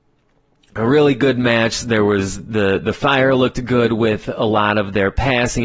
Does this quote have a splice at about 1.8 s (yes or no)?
no